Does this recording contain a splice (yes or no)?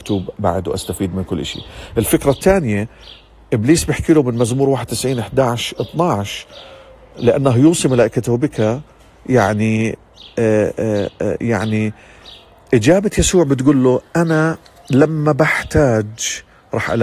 no